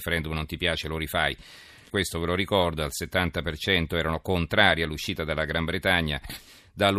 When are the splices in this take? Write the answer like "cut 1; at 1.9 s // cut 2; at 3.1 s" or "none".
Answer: cut 1; at 1.9 s